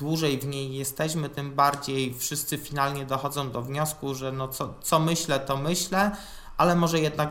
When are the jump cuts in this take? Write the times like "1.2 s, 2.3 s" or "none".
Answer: none